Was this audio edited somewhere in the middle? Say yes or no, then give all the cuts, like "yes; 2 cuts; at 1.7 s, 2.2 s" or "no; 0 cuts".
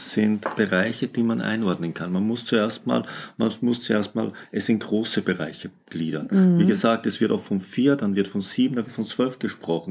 no; 0 cuts